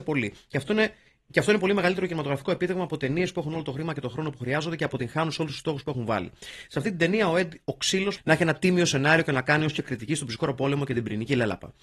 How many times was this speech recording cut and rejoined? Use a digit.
1